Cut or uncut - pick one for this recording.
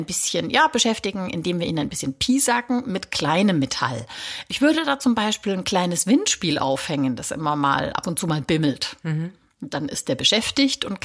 uncut